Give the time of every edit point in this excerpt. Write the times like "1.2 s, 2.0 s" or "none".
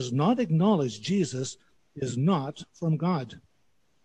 none